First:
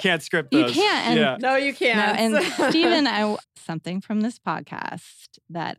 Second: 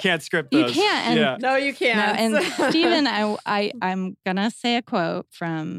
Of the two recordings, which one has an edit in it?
first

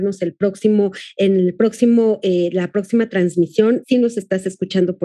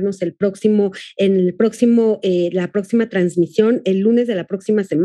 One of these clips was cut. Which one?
first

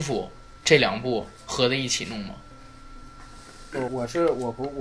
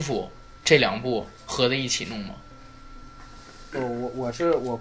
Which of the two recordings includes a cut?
first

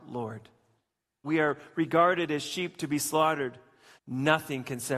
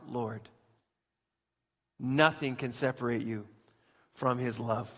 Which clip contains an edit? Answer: first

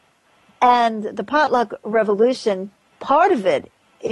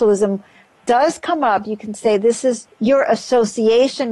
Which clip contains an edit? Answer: second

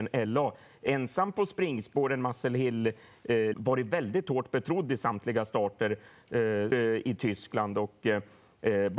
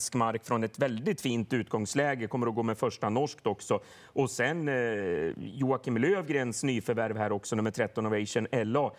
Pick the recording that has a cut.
first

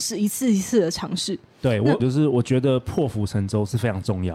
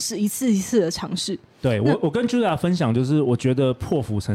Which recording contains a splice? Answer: first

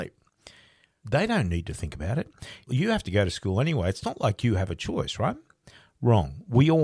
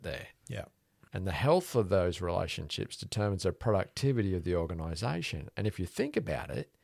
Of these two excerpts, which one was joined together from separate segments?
second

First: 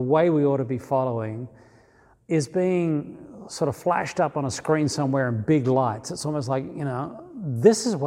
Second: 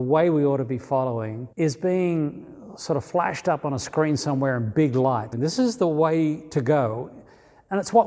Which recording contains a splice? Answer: second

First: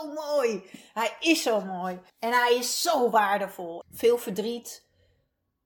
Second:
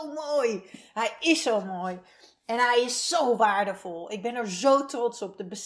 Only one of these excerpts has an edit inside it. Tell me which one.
first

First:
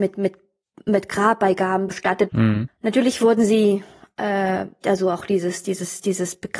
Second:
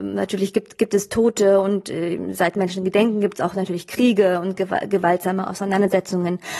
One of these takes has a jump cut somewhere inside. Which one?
first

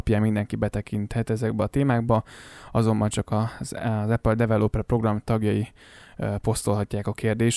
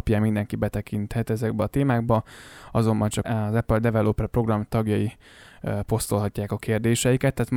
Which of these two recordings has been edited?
second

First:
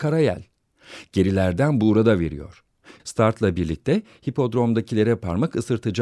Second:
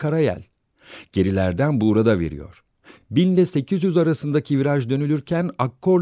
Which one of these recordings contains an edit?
first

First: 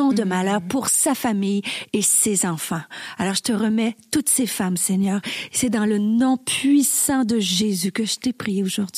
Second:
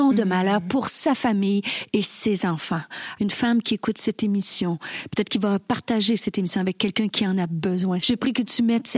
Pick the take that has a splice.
second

